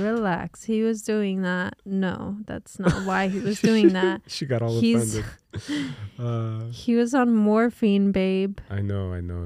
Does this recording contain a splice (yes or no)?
no